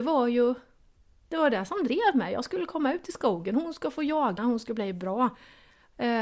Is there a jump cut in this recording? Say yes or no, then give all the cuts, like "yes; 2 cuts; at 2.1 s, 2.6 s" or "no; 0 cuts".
yes; 1 cut; at 4.4 s